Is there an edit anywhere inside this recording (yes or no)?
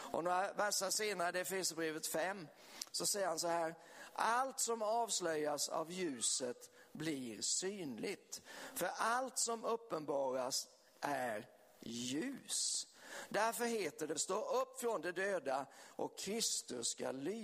yes